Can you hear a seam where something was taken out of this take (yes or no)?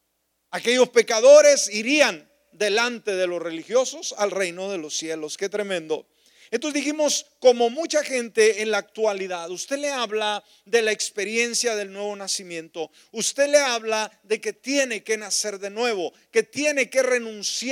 no